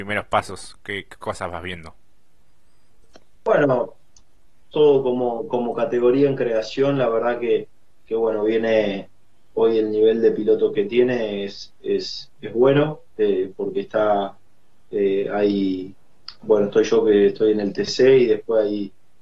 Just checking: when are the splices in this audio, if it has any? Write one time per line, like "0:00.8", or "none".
none